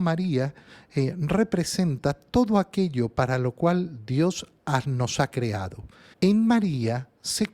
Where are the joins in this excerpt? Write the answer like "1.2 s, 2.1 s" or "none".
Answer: 6.1 s